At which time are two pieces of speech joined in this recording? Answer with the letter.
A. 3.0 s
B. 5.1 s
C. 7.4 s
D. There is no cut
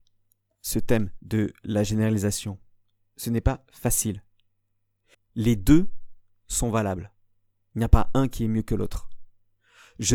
B